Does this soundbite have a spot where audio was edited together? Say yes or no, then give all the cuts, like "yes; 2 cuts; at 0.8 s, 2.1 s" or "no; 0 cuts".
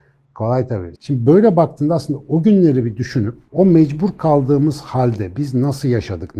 yes; 1 cut; at 1.0 s